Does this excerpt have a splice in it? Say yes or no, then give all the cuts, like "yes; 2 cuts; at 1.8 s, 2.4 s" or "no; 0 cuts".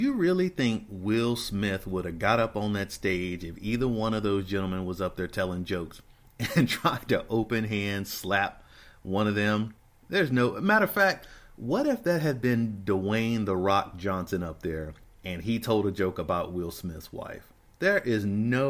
no; 0 cuts